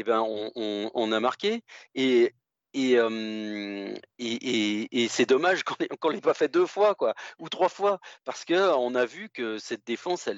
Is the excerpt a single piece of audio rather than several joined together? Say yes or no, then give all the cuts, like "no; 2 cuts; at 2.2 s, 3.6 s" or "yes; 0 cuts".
yes; 0 cuts